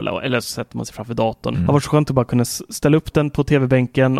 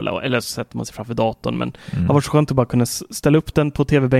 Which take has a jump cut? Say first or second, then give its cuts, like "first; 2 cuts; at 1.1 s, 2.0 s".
first; 1 cut; at 1.5 s